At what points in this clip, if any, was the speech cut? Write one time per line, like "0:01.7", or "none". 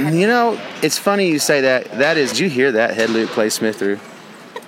0:02.3
0:03.8